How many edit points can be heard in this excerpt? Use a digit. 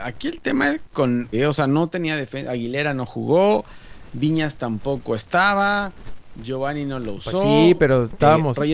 1